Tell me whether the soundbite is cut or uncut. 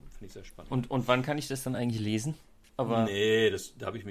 cut